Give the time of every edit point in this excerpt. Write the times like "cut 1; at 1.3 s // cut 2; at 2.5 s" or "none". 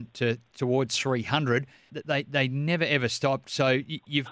cut 1; at 1.9 s